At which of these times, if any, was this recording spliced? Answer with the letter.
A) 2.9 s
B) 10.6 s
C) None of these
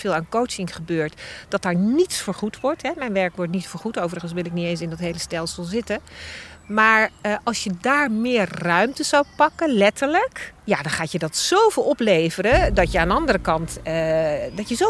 B